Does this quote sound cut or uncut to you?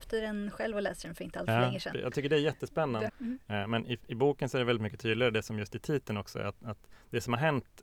cut